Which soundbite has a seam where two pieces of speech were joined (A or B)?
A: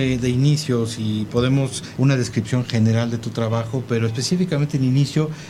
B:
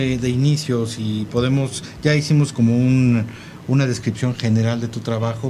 A